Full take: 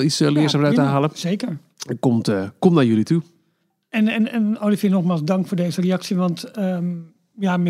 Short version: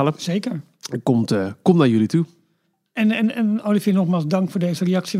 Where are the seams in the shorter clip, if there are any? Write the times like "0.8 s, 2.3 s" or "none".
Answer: none

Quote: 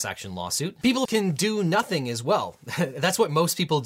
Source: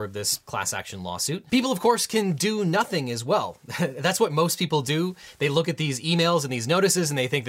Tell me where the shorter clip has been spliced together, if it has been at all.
1.1 s

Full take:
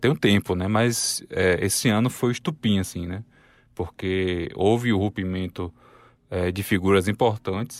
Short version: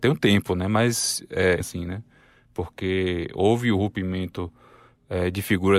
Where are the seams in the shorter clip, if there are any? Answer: 1.6 s

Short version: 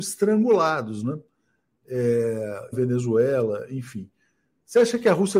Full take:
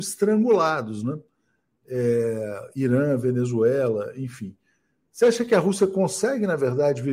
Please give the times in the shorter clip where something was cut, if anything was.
2.7 s

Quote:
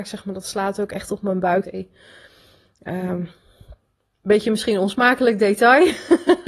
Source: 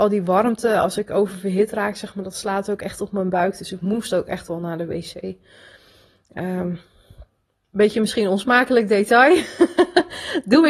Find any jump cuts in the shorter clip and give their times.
1.6 s

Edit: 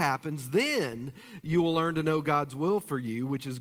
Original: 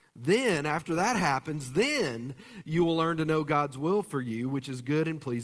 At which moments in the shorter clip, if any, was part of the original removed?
none

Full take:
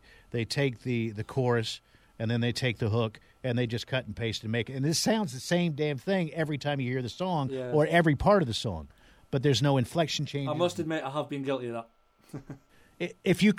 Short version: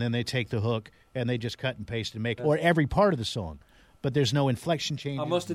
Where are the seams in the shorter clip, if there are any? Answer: 2.4 s

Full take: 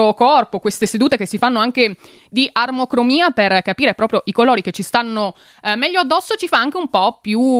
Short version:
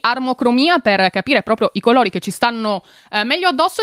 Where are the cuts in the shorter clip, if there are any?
none

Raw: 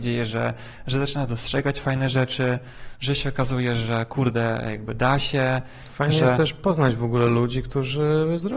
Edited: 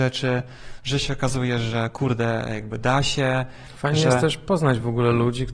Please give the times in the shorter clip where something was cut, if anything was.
none

